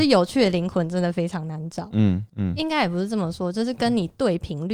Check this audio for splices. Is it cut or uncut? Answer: uncut